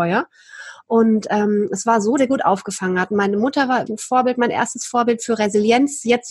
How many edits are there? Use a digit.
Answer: 2